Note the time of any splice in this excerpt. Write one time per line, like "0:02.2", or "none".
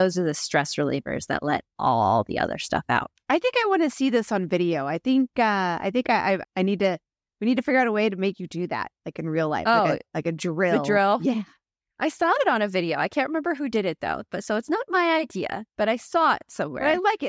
0:06.4